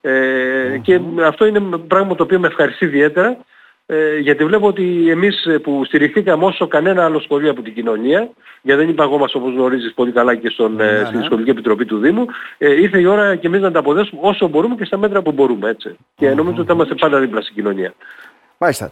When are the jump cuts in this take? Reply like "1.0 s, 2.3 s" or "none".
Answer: 15.2 s